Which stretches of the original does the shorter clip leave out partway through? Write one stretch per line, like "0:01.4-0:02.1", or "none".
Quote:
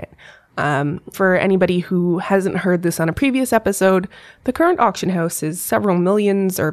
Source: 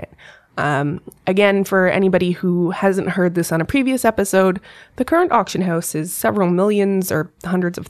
0:01.1-0:01.7